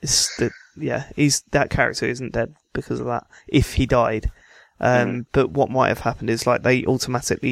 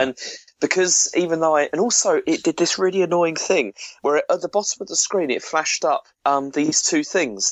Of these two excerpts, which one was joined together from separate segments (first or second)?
second